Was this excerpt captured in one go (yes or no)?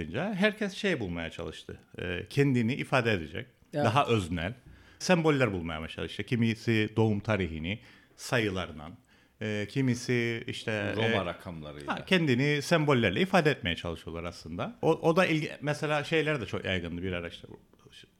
no